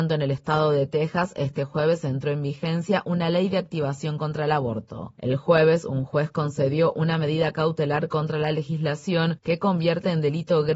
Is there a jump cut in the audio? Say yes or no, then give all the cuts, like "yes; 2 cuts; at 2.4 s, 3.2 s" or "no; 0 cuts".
yes; 1 cut; at 5.2 s